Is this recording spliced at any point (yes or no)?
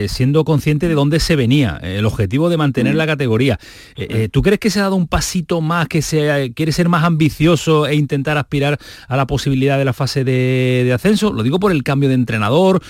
no